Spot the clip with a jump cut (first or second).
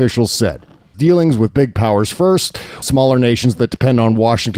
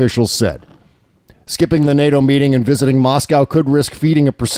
first